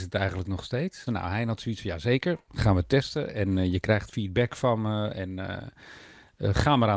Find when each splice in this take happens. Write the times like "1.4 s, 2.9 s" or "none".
1.1 s